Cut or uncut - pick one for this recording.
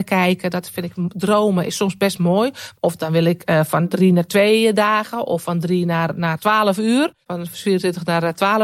cut